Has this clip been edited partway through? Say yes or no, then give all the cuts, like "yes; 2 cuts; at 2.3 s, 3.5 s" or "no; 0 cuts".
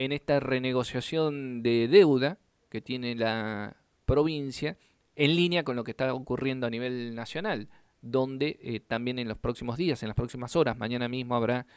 no; 0 cuts